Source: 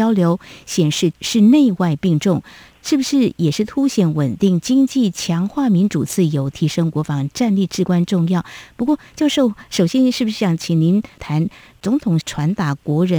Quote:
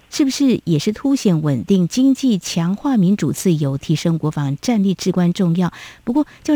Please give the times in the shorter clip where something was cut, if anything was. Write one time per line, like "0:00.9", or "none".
none